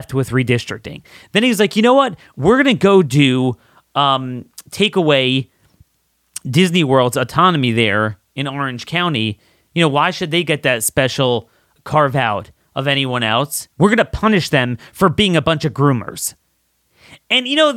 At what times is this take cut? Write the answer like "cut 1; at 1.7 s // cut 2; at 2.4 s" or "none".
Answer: cut 1; at 11.8 s // cut 2; at 13.7 s